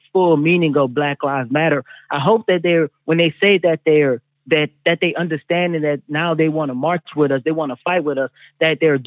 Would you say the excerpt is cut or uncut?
uncut